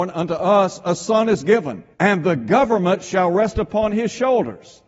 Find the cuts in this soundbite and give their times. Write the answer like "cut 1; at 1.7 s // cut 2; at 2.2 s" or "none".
cut 1; at 1.9 s